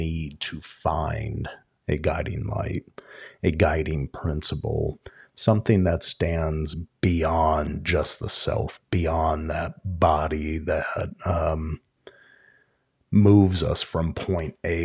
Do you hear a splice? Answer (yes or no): no